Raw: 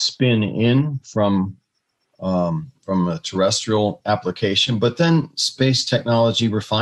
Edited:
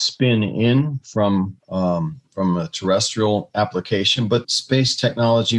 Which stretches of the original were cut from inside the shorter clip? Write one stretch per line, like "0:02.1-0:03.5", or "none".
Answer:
0:01.6-0:02.1
0:04.9-0:05.3